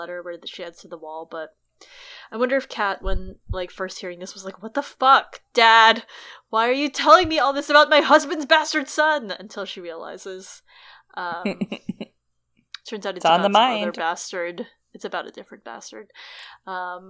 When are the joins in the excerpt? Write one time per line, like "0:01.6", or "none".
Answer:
none